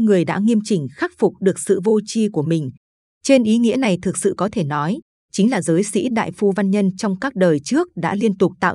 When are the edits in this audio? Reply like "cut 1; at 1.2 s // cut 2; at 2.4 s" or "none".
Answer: none